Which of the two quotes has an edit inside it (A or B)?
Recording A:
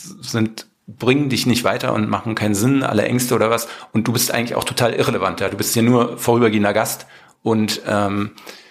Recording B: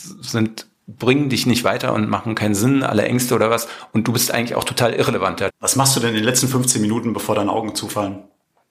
B